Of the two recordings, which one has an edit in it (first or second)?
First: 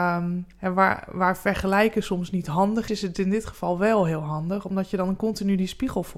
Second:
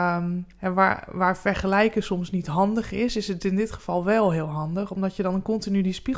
first